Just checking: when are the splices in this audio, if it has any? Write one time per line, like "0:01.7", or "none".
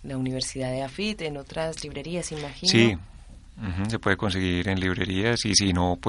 none